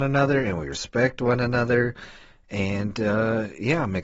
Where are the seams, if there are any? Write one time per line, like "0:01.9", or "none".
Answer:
none

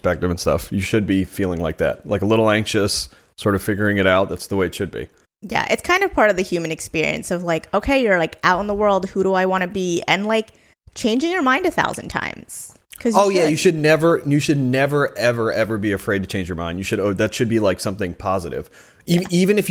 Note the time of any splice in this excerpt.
none

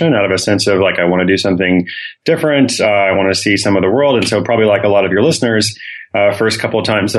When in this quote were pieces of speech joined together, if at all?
none

